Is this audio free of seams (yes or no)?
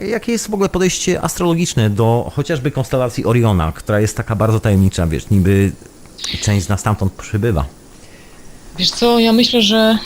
yes